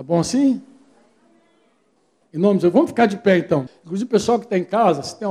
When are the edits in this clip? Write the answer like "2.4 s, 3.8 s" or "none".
2.2 s, 3.7 s